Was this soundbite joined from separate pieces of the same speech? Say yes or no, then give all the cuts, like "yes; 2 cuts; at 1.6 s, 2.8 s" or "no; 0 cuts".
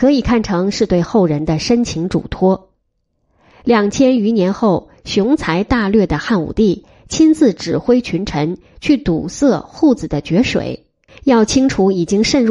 yes; 1 cut; at 11.1 s